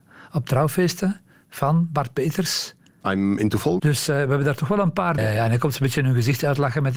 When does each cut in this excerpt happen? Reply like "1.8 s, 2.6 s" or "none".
3.8 s, 5.2 s